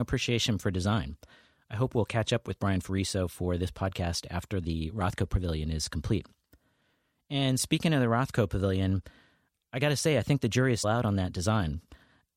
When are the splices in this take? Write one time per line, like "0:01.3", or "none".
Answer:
0:10.8